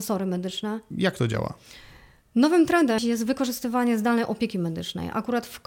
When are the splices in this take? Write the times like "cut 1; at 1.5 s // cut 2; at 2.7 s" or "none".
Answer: cut 1; at 0.9 s // cut 2; at 3.0 s